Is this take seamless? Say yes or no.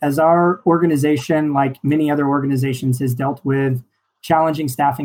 yes